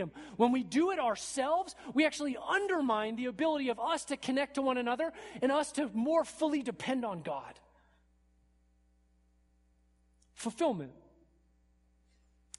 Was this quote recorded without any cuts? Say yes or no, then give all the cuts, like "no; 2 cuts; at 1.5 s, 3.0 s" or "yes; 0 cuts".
yes; 0 cuts